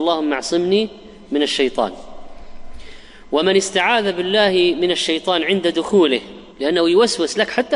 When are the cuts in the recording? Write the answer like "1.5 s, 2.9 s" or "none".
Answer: 6.5 s